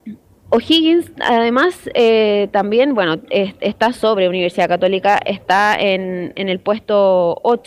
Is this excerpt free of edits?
yes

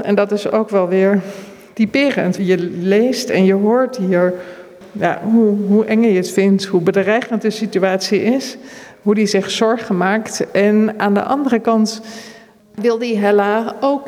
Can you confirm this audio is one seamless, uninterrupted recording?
no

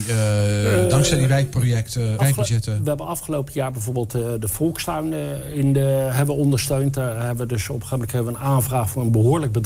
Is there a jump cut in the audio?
yes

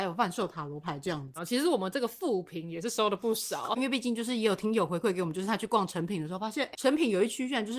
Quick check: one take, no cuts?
no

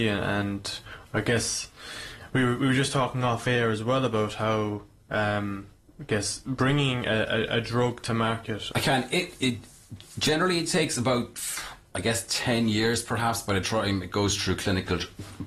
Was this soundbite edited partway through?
yes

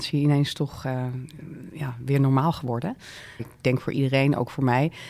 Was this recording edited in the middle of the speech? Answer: yes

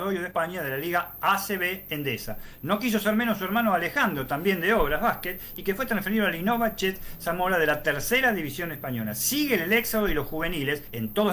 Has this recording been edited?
no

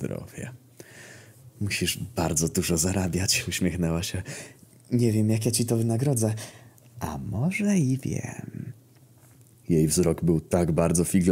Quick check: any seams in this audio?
no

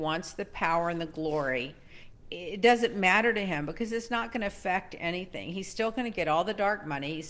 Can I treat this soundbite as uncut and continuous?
no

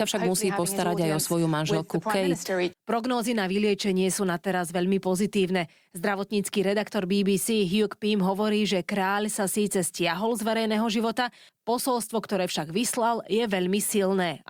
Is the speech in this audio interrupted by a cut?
yes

